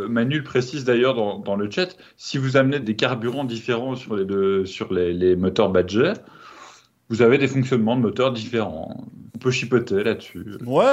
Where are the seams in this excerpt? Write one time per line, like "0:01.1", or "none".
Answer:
0:02.8
0:09.3